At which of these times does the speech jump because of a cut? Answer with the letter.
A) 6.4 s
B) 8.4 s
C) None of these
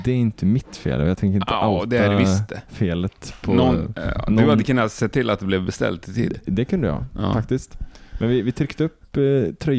C